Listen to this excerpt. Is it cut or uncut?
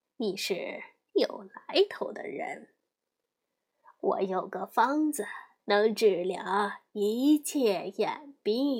cut